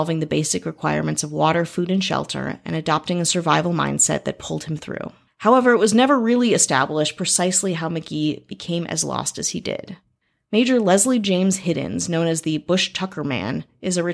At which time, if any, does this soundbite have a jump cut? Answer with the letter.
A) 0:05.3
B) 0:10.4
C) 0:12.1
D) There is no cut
A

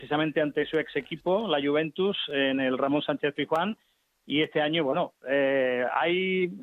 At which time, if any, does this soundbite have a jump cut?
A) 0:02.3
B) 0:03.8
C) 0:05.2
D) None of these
D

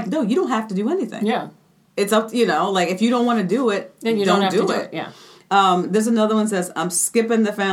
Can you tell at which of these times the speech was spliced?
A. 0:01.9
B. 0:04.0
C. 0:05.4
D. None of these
A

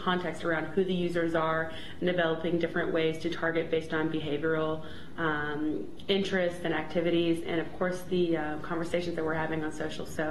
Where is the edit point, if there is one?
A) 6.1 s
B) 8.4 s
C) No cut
C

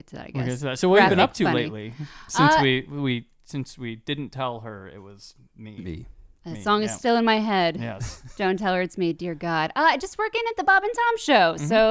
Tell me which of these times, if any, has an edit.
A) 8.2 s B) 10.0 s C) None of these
C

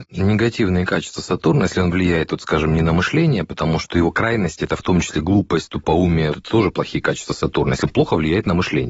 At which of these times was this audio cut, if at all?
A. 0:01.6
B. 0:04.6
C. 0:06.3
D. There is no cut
C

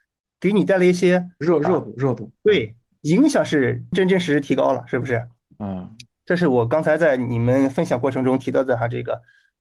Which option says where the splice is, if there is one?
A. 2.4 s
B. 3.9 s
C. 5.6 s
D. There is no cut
B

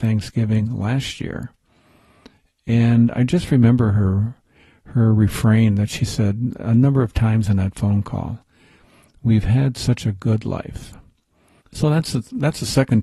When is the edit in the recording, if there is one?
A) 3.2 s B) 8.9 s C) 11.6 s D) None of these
C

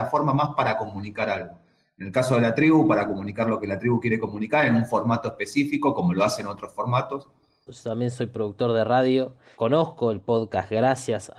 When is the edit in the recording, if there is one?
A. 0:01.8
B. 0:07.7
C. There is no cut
B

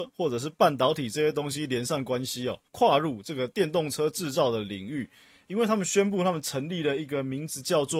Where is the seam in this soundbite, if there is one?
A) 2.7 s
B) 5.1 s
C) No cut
A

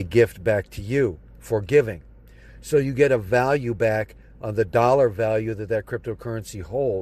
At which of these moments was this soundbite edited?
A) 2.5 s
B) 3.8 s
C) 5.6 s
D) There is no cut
A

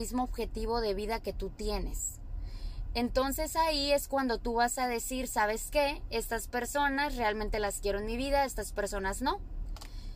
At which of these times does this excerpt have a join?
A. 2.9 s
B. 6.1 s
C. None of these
C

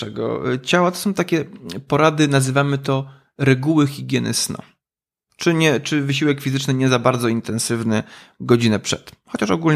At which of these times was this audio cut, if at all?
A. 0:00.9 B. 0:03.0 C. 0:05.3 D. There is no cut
C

